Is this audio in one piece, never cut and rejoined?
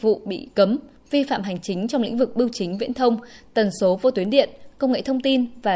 yes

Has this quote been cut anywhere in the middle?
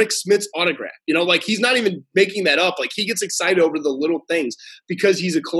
no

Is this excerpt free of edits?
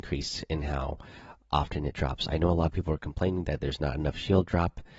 yes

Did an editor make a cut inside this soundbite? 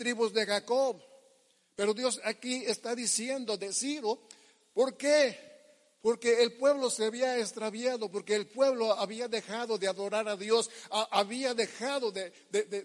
no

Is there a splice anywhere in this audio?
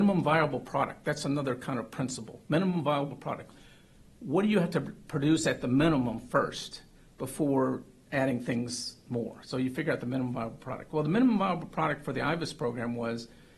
no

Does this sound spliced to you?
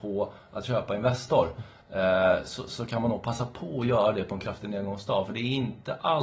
no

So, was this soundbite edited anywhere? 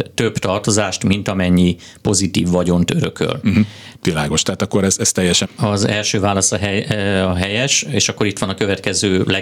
yes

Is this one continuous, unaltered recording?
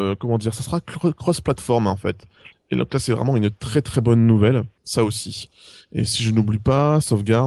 no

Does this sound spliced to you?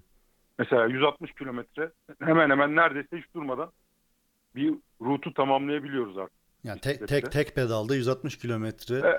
no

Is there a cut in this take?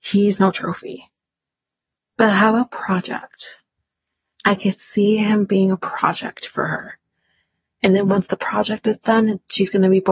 no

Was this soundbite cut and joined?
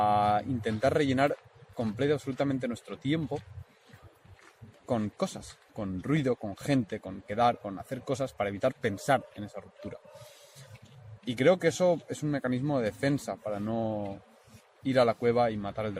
no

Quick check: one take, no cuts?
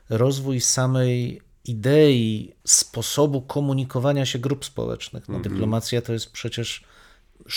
no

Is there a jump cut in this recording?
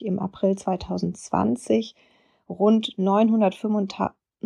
no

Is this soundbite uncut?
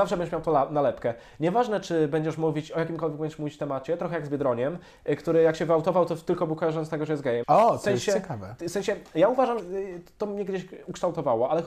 no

